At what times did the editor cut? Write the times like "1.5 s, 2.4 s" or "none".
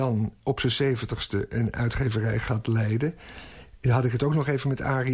none